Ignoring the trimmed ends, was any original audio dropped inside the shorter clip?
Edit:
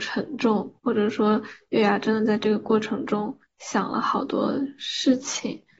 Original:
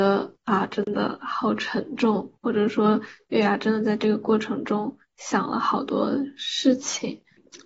no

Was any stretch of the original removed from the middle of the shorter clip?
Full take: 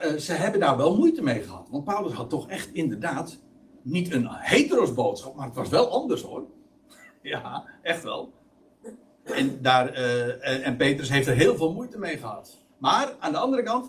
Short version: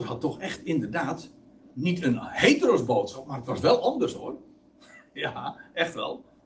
no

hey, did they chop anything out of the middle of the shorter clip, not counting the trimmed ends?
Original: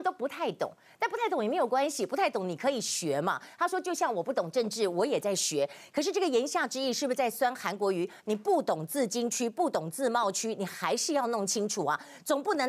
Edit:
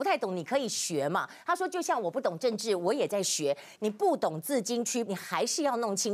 yes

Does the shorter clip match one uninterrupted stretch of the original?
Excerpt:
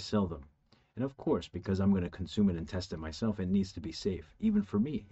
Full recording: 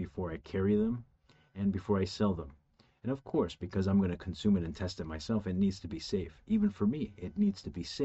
yes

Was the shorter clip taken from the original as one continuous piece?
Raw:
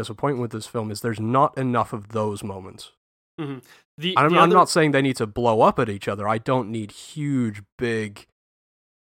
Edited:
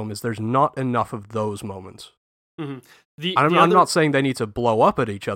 yes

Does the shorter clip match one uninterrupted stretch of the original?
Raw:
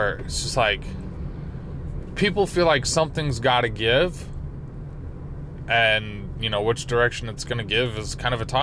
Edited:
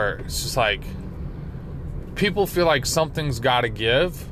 yes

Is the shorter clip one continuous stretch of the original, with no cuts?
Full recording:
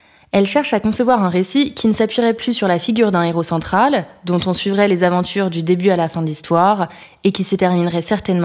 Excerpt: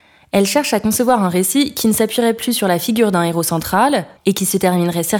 no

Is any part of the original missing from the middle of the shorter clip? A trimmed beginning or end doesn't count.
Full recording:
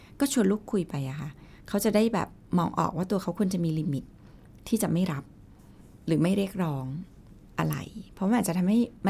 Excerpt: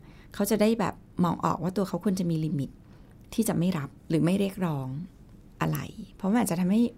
yes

